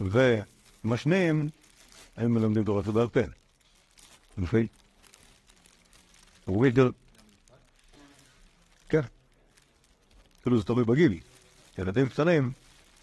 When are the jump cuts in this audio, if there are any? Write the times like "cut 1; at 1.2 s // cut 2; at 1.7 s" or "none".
none

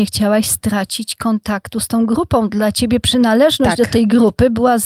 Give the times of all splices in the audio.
none

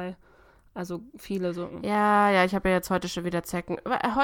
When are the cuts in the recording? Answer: none

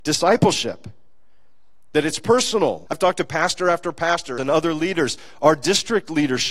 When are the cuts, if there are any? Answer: cut 1; at 2.9 s // cut 2; at 4.4 s

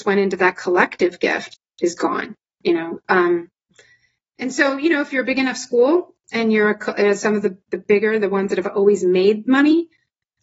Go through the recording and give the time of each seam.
none

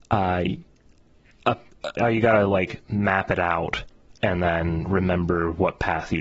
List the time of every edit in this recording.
cut 1; at 2.0 s

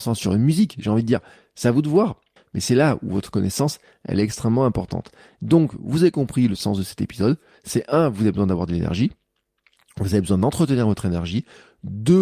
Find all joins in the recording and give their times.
cut 1; at 2.4 s

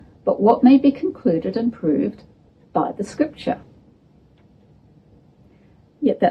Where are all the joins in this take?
none

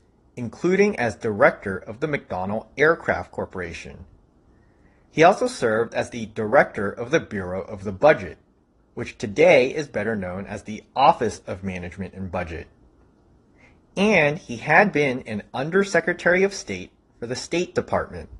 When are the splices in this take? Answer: none

